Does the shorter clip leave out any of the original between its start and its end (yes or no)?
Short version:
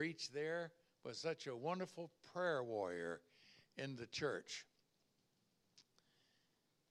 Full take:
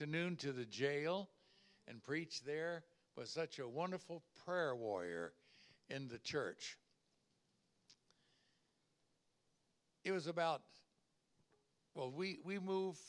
no